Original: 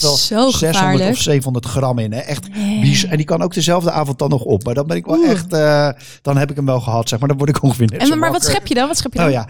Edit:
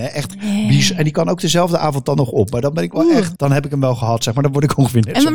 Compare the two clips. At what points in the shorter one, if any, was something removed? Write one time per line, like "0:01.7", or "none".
0:03.4